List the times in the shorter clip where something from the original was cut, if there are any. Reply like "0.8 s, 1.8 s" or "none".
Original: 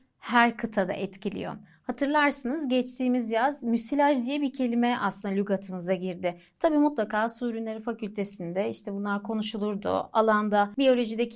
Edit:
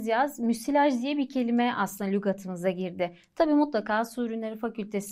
none

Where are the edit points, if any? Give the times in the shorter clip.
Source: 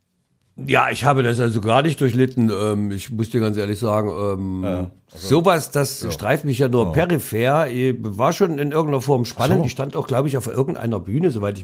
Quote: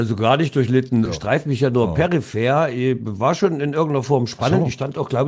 1.1 s

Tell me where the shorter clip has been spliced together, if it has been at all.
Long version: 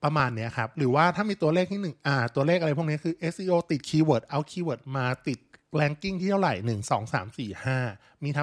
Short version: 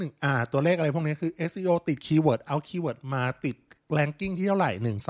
none

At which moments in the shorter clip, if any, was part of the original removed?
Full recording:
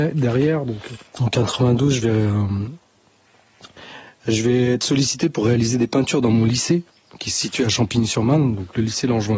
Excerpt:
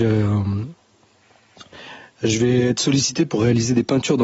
none

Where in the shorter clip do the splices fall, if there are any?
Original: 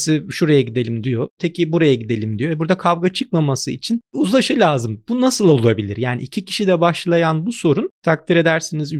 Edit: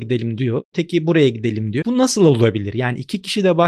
1.8 s

